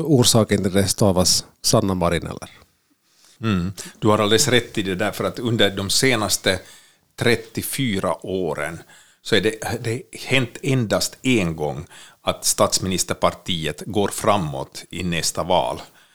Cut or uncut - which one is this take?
cut